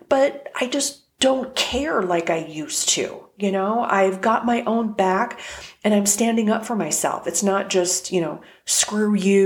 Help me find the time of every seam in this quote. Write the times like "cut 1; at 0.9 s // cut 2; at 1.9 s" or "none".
none